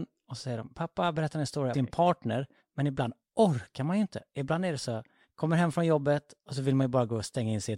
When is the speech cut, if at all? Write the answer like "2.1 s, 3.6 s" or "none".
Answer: 1.7 s